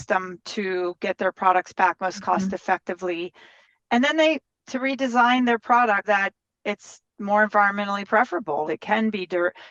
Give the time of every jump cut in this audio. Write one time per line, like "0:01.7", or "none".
0:06.0
0:08.6